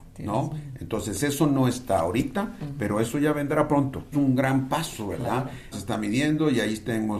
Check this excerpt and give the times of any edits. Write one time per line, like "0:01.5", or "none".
0:04.1
0:05.7